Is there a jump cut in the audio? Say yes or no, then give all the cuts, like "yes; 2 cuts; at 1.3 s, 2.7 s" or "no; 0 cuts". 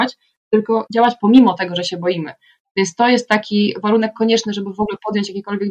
no; 0 cuts